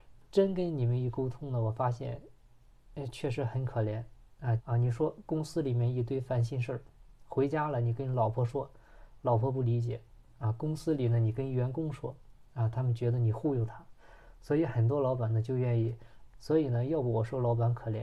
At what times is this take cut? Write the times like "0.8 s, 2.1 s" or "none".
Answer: 4.6 s, 16.3 s